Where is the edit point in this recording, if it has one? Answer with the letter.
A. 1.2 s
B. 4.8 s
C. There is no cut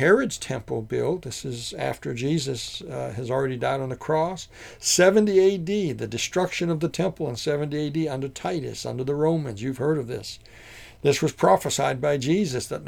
C